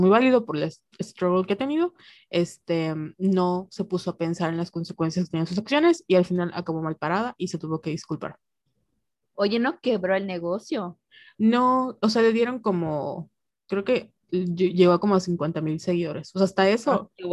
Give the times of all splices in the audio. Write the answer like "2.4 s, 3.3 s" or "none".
9.3 s